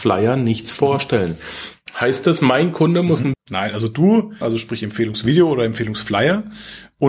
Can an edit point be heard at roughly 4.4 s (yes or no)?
yes